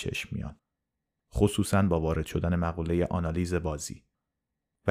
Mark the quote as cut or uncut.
cut